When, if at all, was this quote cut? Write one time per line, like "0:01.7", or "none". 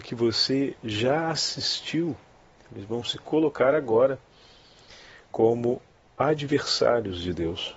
0:02.6